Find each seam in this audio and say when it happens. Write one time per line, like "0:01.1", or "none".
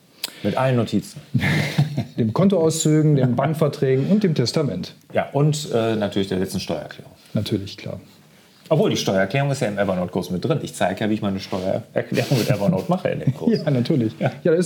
none